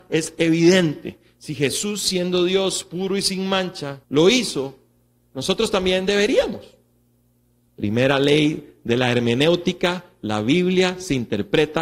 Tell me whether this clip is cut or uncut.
cut